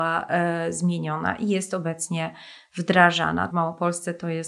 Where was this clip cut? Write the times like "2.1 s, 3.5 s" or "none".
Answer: 3.5 s